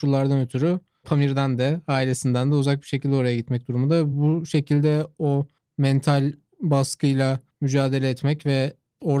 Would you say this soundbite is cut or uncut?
uncut